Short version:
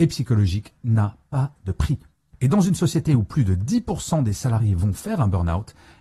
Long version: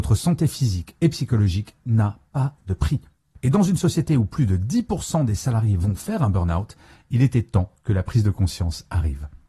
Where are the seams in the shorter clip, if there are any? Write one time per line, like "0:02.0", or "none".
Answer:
none